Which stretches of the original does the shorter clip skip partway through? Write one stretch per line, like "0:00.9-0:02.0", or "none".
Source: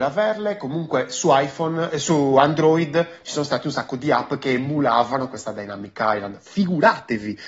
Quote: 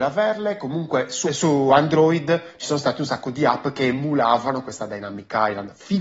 0:01.2-0:01.9